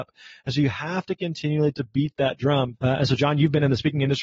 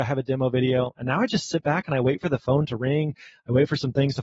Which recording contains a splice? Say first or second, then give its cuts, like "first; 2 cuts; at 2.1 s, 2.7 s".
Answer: first; 1 cut; at 2.7 s